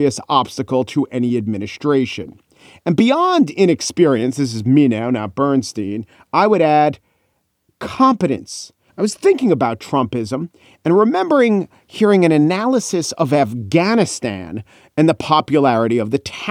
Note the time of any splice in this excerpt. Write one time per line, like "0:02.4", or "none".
0:08.9